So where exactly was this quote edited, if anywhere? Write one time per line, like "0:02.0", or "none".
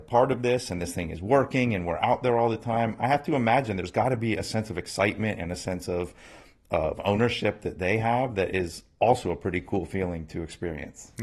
none